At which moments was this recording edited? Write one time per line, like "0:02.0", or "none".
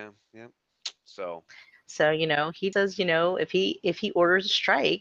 0:02.7